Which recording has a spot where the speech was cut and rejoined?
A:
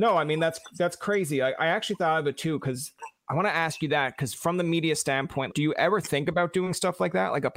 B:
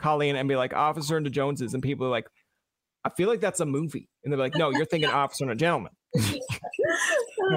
A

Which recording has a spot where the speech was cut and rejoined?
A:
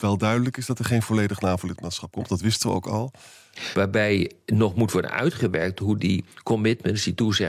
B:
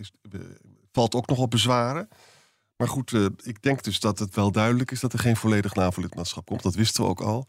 A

